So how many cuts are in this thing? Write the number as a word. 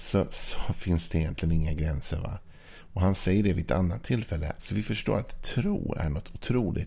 one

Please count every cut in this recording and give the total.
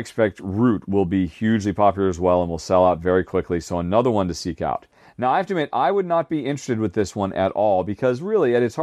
zero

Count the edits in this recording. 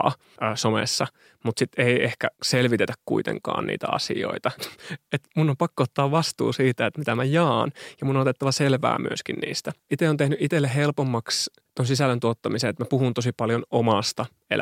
two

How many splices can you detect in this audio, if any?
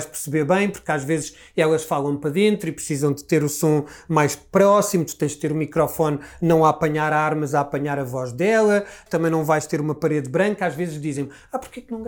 one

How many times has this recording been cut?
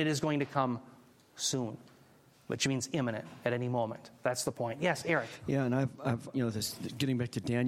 one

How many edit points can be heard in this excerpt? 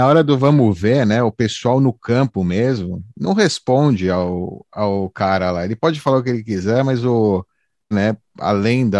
one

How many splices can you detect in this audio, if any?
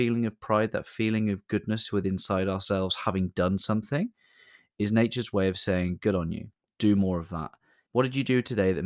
one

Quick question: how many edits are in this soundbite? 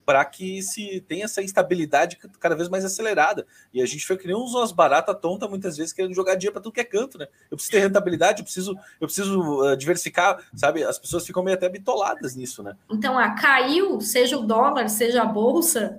one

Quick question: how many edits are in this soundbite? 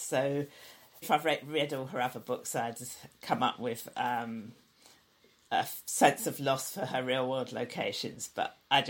one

